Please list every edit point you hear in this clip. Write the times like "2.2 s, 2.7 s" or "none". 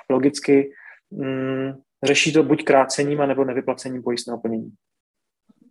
1.0 s